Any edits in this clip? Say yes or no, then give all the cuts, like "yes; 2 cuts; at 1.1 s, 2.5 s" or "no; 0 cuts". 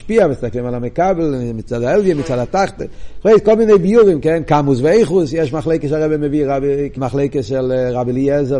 yes; 1 cut; at 6.9 s